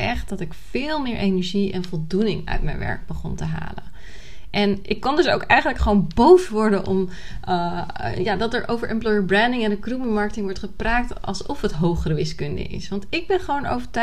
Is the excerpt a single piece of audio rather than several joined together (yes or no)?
no